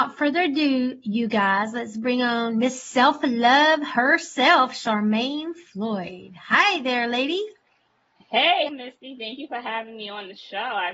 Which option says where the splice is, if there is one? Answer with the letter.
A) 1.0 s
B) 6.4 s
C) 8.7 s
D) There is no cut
C